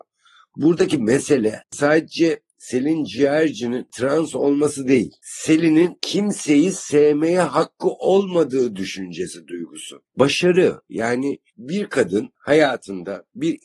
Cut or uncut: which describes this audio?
cut